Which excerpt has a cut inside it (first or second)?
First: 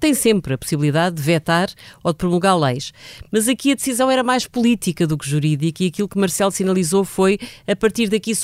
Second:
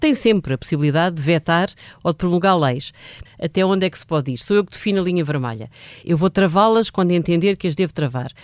second